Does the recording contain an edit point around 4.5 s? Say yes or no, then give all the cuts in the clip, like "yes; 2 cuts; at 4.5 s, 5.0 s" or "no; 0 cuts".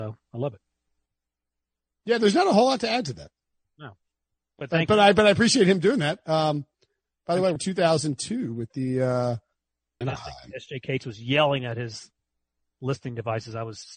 no; 2 cuts; at 7.6 s, 10.0 s